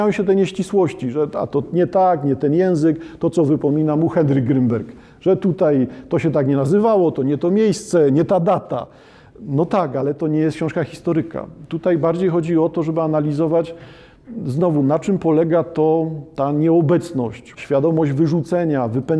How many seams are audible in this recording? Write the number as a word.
one